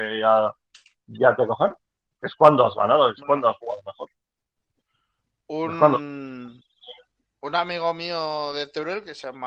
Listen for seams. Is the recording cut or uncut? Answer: uncut